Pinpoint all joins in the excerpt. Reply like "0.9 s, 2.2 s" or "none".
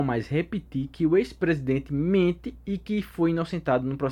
none